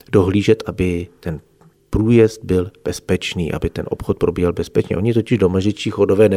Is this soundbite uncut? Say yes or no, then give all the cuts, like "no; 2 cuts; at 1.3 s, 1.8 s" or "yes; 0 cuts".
yes; 0 cuts